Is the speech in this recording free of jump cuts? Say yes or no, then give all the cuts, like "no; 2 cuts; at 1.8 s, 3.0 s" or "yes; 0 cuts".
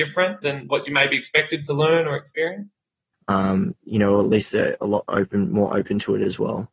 no; 1 cut; at 3.1 s